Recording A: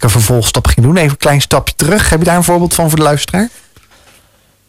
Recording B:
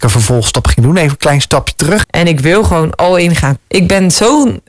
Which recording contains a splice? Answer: B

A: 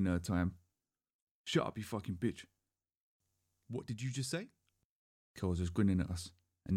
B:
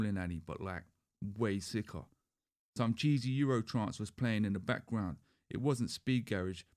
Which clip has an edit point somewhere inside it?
A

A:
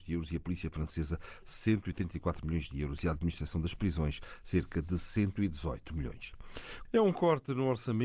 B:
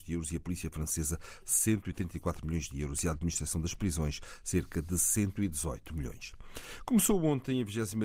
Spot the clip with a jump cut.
A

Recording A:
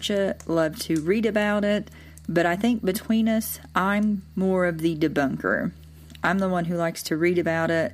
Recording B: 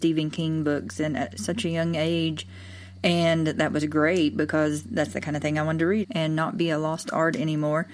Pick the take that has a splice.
B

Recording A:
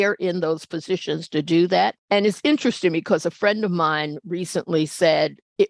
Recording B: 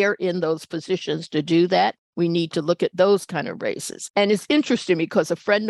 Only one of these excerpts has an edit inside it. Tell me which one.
A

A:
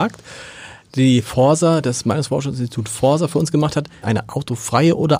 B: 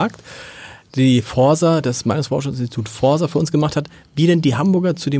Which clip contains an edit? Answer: A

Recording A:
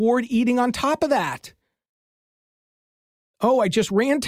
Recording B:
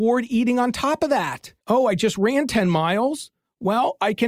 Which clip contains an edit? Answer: B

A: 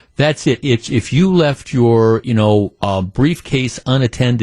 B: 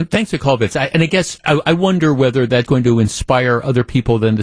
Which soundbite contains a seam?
B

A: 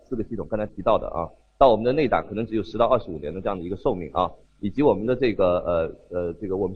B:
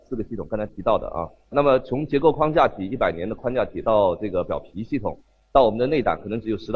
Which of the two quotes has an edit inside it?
A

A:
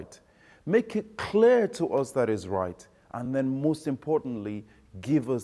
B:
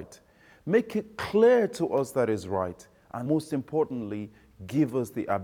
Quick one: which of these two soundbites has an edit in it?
B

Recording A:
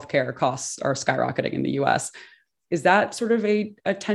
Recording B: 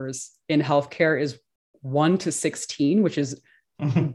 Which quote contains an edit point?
A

